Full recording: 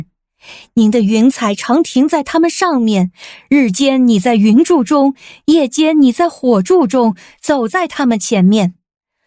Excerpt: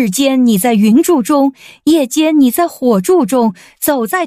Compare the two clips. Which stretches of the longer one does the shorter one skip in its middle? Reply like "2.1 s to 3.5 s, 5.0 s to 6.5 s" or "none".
none